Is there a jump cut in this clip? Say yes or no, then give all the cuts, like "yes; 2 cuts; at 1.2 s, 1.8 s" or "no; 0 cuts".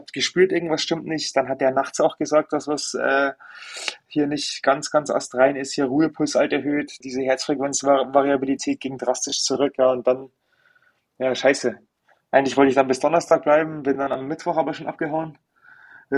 yes; 1 cut; at 7.0 s